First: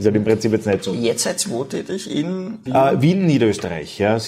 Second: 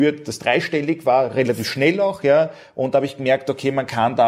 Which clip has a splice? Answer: first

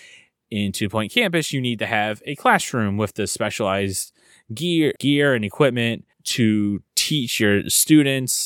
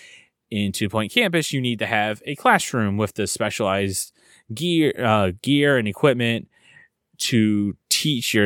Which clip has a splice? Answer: first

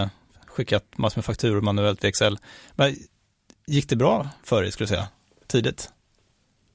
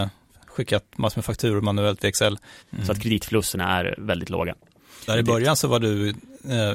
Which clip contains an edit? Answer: second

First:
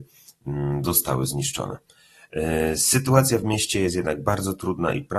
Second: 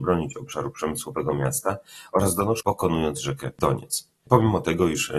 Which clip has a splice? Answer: second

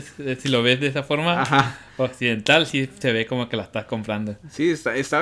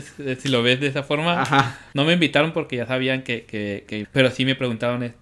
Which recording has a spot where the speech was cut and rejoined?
second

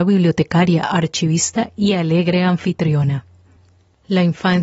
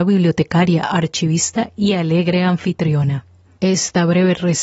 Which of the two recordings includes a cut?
second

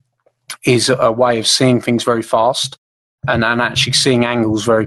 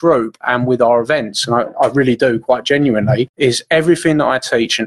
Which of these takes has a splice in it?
second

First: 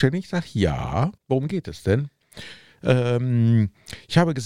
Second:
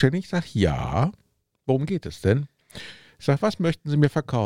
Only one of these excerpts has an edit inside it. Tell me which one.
first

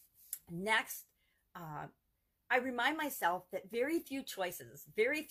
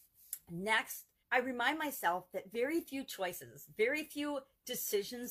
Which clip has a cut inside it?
second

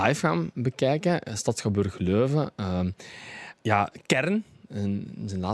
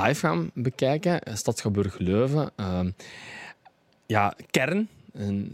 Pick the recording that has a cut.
first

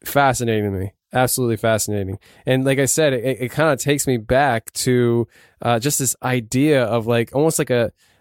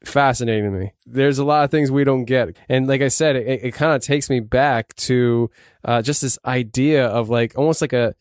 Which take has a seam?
second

